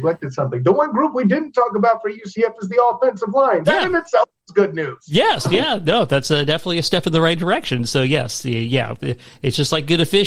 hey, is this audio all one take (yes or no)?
yes